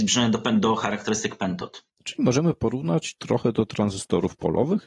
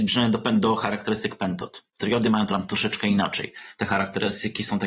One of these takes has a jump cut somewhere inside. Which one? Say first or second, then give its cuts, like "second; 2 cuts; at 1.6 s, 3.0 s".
first; 1 cut; at 1.9 s